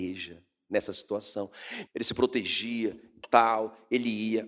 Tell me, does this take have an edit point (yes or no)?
yes